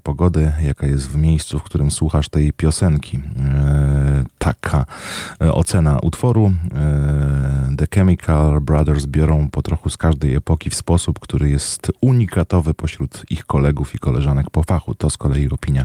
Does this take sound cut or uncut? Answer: uncut